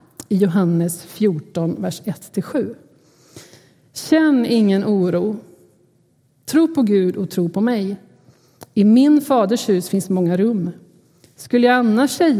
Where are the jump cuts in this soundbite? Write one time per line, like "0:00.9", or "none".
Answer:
none